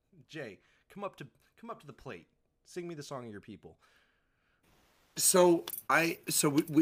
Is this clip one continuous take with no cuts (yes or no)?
no